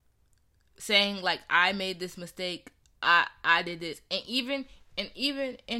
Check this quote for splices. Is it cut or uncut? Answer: uncut